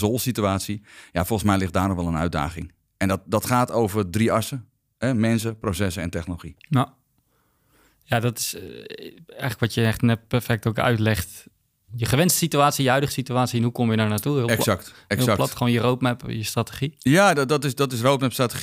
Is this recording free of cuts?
no; 1 cut; at 6.6 s

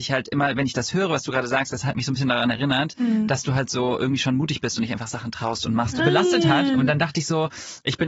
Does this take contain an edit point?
yes; 1 cut; at 6.0 s

